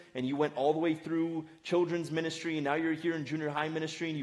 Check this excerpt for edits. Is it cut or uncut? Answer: uncut